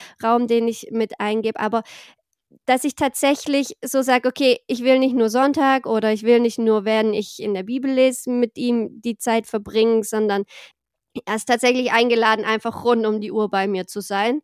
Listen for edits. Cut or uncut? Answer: uncut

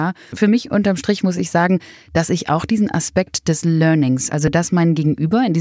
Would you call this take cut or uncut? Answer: uncut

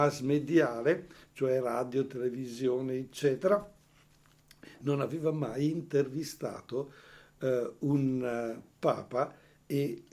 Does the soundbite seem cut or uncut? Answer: uncut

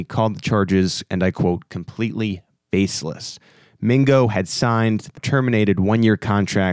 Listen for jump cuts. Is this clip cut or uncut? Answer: cut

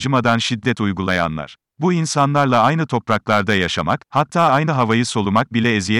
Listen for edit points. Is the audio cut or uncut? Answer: cut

